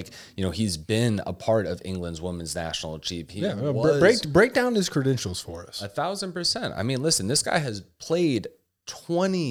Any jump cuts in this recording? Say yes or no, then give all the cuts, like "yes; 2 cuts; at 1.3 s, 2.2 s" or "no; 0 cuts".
no; 0 cuts